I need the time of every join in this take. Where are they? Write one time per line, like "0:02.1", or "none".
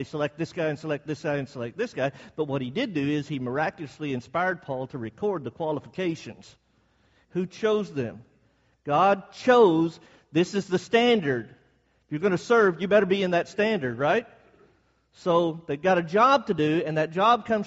0:07.2

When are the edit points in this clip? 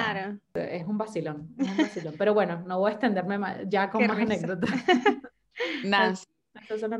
none

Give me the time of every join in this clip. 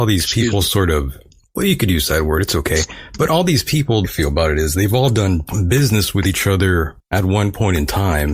0:04.0

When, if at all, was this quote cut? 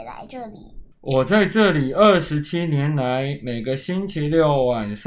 0:00.9

